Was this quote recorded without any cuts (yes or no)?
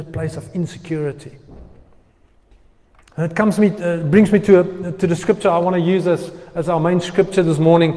yes